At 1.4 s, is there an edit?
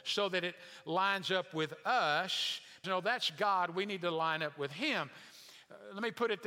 no; 1 cut; at 2.8 s

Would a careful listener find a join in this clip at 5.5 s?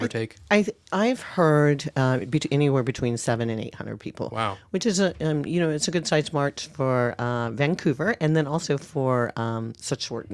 no; 0 cuts

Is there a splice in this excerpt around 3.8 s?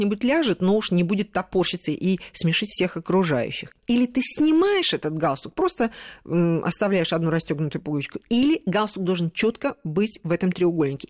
yes; 1 cut; at 3.8 s

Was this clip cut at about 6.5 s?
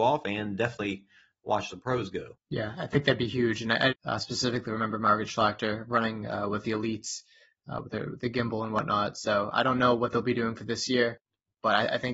no; 1 cut; at 3.9 s

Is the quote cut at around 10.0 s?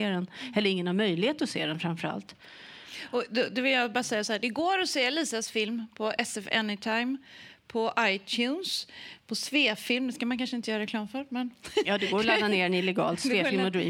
no; 0 cuts

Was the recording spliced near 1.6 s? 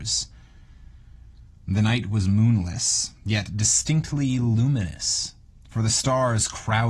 yes; 1 cut; at 1.6 s

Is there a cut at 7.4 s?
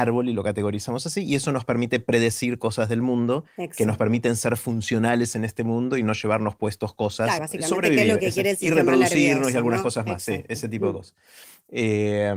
yes; 1 cut; at 7.4 s

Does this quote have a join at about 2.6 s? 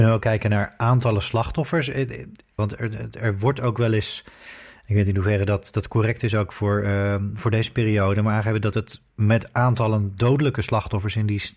yes; 1 cut; at 2.6 s

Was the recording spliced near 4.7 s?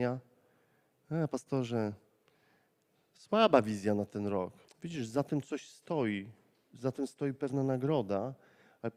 yes; 1 cut; at 4.7 s

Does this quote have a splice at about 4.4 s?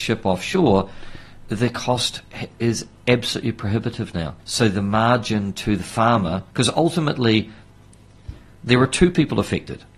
yes; 2 cuts; at 4.4 s, 6.5 s

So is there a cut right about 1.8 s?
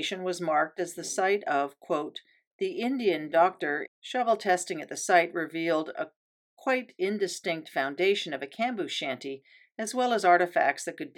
no; 1 cut; at 3.8 s

